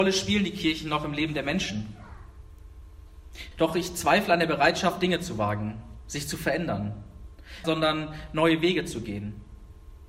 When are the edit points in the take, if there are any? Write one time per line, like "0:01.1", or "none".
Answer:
0:03.5
0:07.6